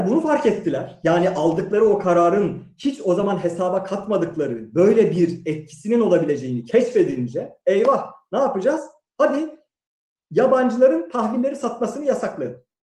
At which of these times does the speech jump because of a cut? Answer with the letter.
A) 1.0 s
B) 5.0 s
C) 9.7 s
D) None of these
D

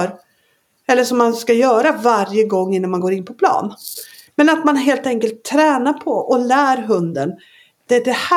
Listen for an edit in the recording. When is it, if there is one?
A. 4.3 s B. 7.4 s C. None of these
A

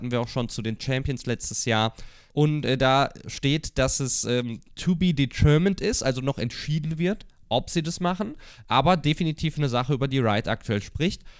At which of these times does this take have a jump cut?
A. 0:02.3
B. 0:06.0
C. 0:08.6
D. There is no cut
A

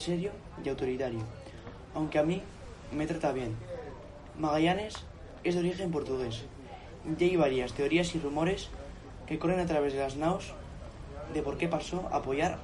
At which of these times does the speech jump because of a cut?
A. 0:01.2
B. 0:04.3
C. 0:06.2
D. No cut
D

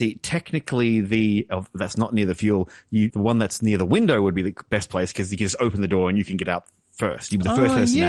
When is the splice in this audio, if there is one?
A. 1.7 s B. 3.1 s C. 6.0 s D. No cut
B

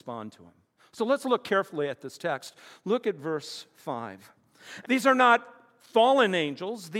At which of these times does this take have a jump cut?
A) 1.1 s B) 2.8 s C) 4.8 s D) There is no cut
C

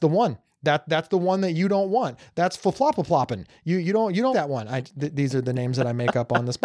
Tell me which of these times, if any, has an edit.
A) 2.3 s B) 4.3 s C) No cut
B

